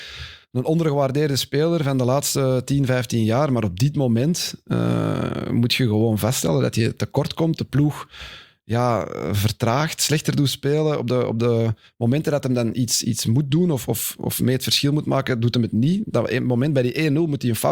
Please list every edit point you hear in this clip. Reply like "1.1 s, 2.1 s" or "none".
none